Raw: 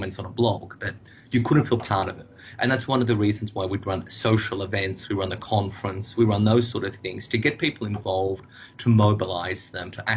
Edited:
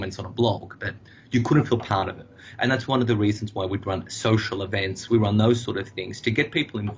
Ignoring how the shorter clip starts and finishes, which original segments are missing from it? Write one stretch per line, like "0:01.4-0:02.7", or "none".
0:05.1-0:06.1